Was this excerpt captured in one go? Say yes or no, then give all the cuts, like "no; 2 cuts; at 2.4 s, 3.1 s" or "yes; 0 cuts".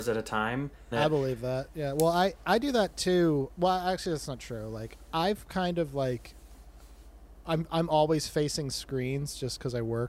no; 1 cut; at 0.9 s